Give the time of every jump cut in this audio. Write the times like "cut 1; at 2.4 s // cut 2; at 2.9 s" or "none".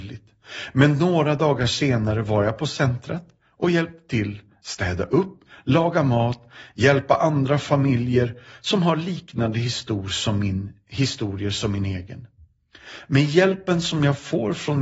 none